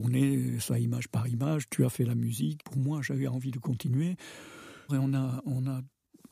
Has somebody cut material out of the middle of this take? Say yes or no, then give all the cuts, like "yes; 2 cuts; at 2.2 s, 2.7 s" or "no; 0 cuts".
yes; 2 cuts; at 2.6 s, 4.9 s